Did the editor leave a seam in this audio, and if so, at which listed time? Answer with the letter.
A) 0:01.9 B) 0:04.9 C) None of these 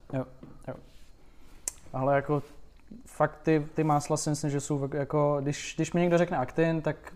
C